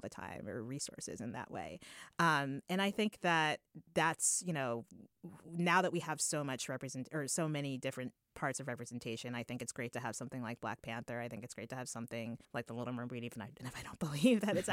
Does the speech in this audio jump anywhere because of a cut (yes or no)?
yes